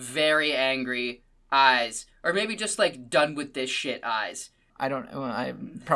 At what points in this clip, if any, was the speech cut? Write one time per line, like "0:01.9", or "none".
0:04.7